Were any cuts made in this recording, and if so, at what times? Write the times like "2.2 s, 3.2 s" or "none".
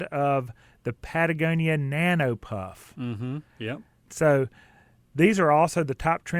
4.1 s